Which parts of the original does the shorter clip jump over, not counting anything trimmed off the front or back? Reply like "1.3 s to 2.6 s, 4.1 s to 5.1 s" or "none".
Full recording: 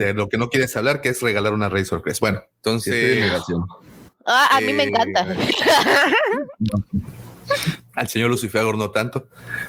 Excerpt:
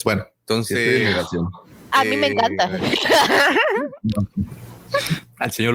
4.1 s to 4.5 s